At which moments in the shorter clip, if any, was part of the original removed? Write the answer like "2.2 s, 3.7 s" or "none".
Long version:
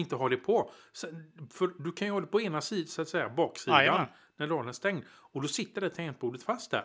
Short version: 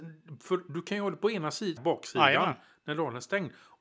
1.8 s

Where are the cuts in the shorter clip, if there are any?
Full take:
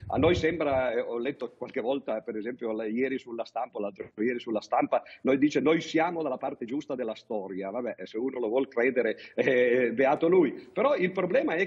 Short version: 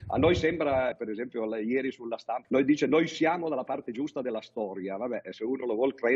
0.9 s, 2.4 s

